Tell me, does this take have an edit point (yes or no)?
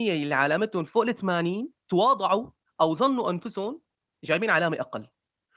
yes